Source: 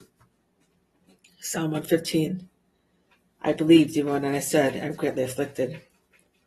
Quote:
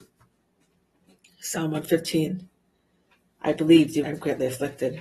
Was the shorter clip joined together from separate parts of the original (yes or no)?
yes